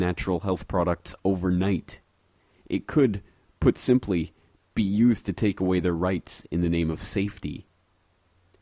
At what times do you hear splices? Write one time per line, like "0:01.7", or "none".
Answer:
none